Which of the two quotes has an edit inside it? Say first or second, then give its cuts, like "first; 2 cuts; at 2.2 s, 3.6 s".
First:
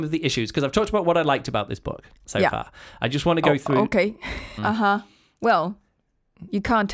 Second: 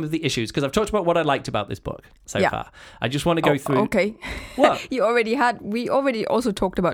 first; 1 cut; at 4.6 s